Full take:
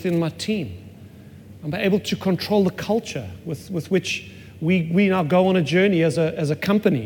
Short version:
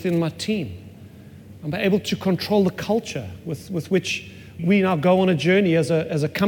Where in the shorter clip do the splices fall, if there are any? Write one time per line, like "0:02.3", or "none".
0:04.6